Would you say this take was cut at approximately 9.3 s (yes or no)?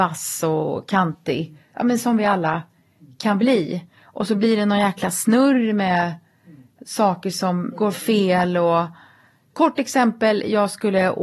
no